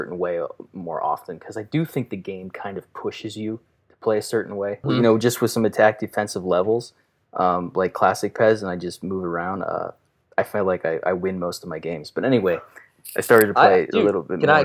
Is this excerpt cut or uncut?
cut